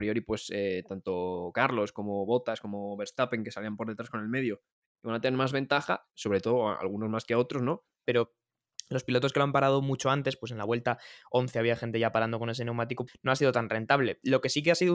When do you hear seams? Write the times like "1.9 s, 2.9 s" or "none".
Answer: 6.1 s, 8.1 s, 13.1 s